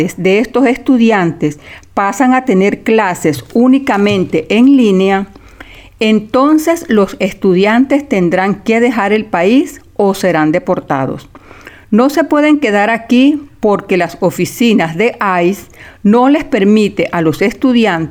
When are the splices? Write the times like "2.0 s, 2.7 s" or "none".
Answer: none